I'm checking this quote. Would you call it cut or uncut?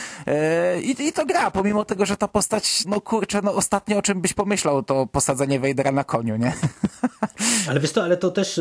cut